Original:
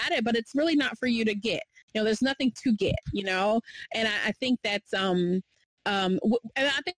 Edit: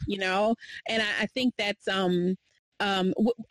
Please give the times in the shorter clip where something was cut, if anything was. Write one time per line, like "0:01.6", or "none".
none